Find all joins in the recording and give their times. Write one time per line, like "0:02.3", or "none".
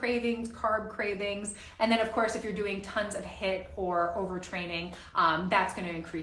none